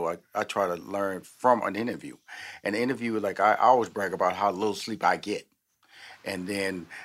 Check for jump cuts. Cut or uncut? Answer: uncut